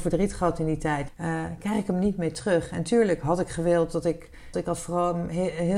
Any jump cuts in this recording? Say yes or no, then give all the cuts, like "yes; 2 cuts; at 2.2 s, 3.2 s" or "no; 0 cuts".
yes; 2 cuts; at 1.1 s, 4.5 s